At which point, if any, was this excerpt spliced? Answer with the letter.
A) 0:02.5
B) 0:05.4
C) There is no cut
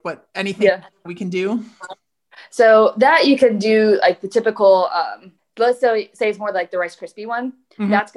B